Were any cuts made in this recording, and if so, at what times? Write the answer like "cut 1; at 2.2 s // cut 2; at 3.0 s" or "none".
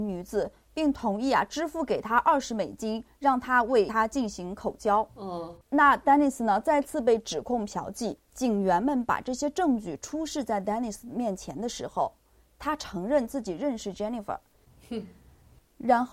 cut 1; at 8.2 s // cut 2; at 14.6 s